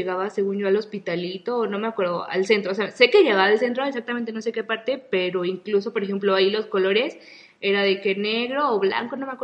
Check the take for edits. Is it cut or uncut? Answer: uncut